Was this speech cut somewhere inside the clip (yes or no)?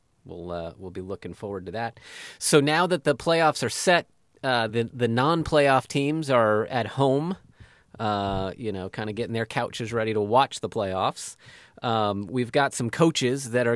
no